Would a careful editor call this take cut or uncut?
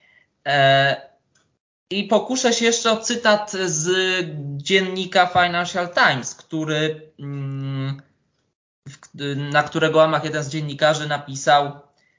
uncut